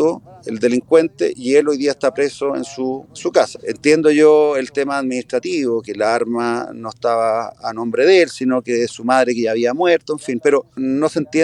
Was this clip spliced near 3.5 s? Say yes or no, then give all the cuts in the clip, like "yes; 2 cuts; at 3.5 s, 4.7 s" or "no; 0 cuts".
yes; 1 cut; at 3.5 s